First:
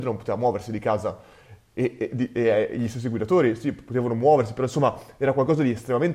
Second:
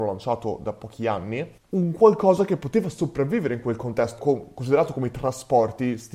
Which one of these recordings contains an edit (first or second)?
second